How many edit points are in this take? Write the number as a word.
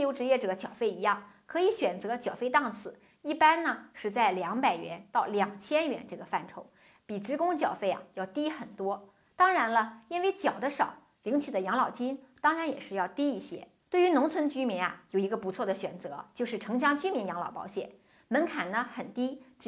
one